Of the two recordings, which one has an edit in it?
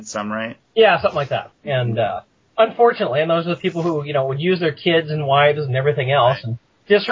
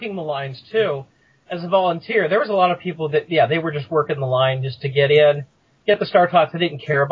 first; 1 cut; at 1.5 s

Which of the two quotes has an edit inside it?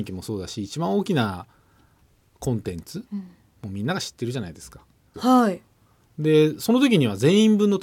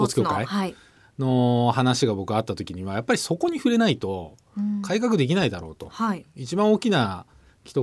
first; 1 cut; at 5.1 s

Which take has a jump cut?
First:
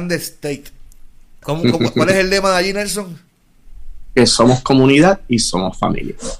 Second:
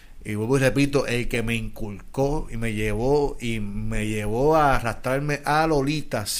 first; 1 cut; at 1.4 s

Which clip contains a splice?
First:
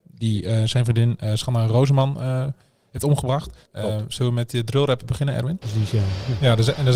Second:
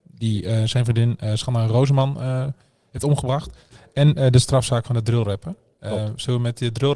first; 2 cuts; at 3.7 s, 5.6 s

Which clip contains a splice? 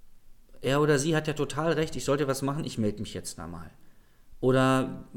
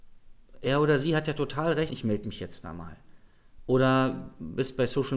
second; 1 cut; at 1.9 s

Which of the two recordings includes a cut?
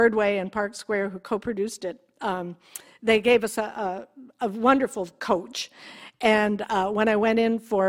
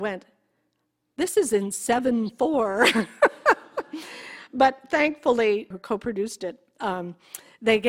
second; 1 cut; at 5.7 s

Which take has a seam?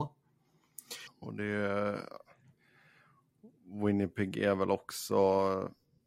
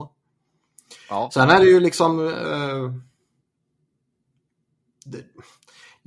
first; 1 cut; at 1.1 s

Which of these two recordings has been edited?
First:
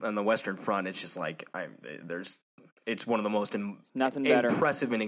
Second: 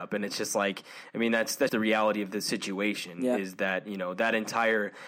second; 1 cut; at 1.7 s

